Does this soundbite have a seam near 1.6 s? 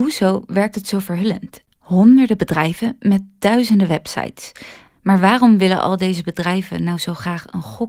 yes; 1 cut; at 1.6 s

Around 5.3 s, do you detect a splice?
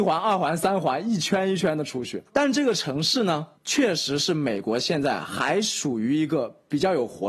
no; 2 cuts; at 2.3 s, 3.6 s

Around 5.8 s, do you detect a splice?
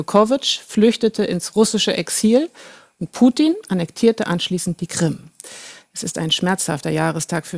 yes; 1 cut; at 5.8 s

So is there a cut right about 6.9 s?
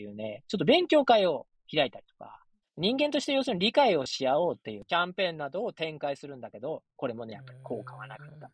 no; 0 cuts

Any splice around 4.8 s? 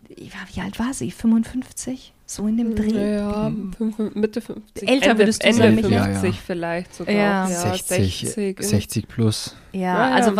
no; 0 cuts

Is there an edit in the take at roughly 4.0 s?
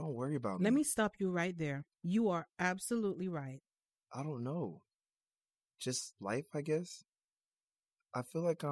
yes; 2 cuts; at 1.9 s, 4.0 s

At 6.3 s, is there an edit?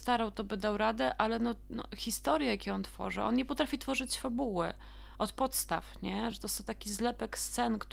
no; 0 cuts

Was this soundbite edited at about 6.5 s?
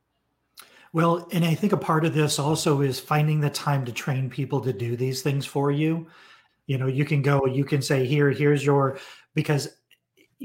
yes; 1 cut; at 6.5 s

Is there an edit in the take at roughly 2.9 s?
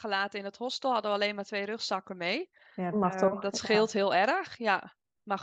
yes; 1 cut; at 2.9 s

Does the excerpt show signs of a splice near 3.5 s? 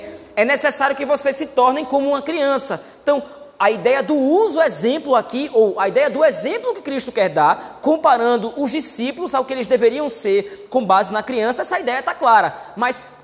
no; 0 cuts

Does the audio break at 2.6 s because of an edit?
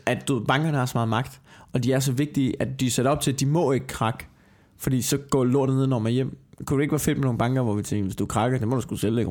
no; 0 cuts

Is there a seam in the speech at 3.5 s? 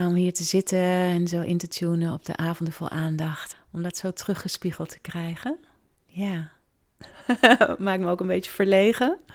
yes; 1 cut; at 3.5 s

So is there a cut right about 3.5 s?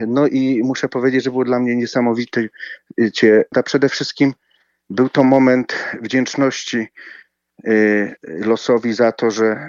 yes; 1 cut; at 3.5 s

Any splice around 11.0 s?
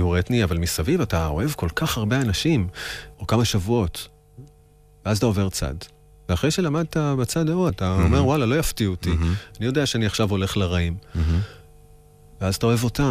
no; 2 cuts; at 3.1 s, 7.7 s

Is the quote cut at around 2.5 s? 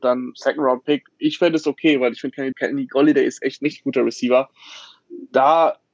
yes; 1 cut; at 2.5 s

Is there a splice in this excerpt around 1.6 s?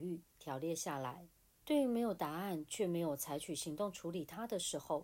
yes; 1 cut; at 1.6 s

